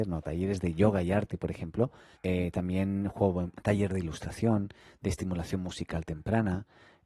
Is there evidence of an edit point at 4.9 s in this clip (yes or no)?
no